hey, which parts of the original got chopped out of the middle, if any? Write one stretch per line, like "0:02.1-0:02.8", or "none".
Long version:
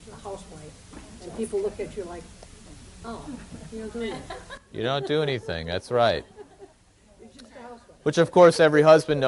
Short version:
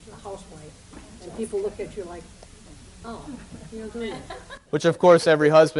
0:04.6-0:08.0